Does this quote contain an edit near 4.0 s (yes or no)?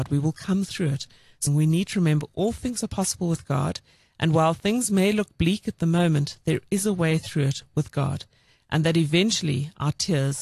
no